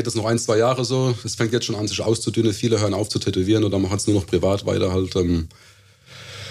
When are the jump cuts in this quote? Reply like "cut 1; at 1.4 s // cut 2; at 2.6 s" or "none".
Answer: none